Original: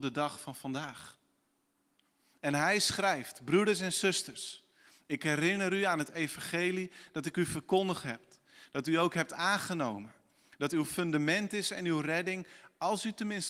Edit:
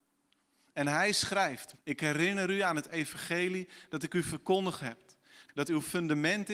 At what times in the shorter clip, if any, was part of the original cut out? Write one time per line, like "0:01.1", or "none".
0:01.7
0:05.5

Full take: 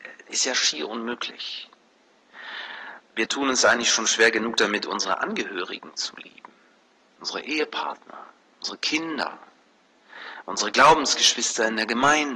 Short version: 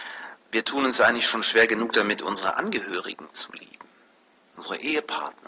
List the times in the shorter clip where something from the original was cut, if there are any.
none

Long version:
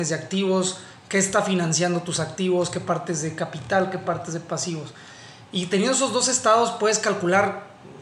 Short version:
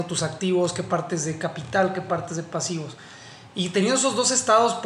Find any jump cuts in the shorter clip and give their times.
none

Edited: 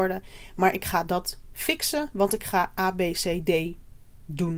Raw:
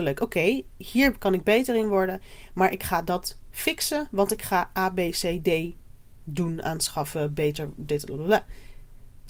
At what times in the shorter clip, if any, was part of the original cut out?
none

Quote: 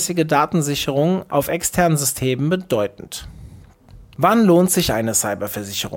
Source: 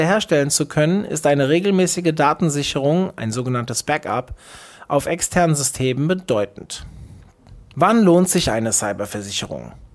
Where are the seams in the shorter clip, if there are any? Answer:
0:01.3

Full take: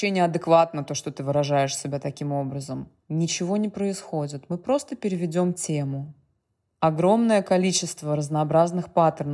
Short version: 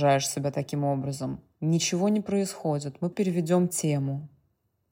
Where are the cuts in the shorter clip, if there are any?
0:03.1

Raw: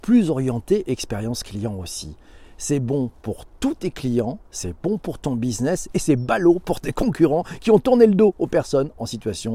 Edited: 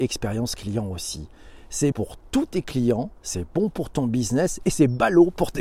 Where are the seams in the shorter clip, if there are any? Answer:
0:01.9

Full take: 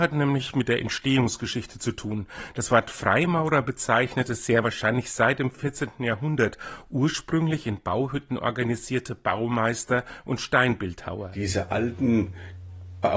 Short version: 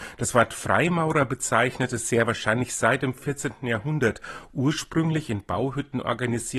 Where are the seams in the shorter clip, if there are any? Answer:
none

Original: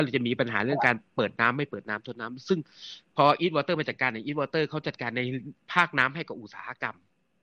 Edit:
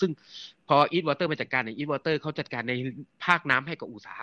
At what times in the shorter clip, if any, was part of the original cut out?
none

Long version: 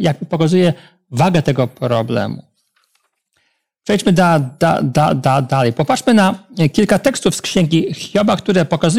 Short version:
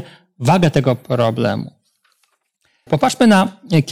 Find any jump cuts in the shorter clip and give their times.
0:02.9

